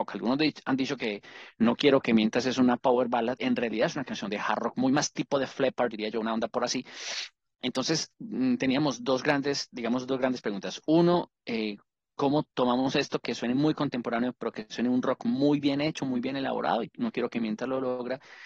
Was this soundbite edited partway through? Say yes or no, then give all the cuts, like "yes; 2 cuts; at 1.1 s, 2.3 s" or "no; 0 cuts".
no; 0 cuts